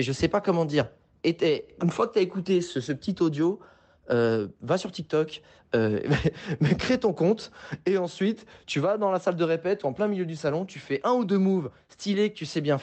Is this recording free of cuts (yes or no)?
yes